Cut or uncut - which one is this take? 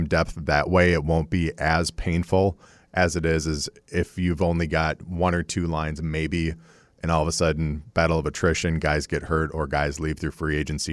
uncut